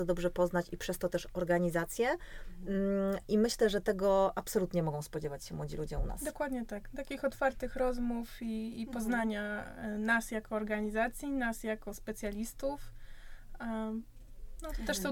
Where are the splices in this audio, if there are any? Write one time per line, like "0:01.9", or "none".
none